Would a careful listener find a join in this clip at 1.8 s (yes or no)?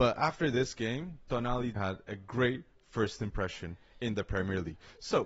yes